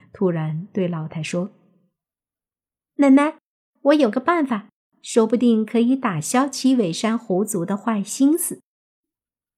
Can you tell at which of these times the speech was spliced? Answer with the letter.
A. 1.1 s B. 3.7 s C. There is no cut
A